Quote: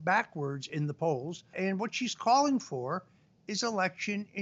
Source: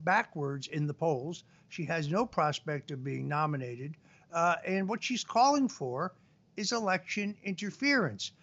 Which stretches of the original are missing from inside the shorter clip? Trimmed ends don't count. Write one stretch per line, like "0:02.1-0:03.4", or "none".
0:01.5-0:04.6